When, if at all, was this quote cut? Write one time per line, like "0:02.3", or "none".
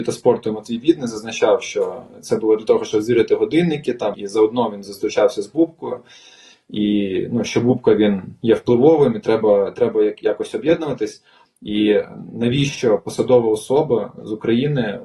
0:04.1
0:11.5